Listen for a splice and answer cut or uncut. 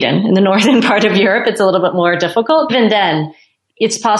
cut